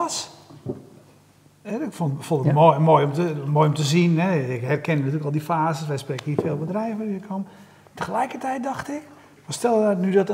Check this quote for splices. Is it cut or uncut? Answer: uncut